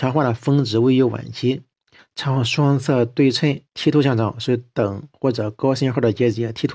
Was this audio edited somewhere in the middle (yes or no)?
yes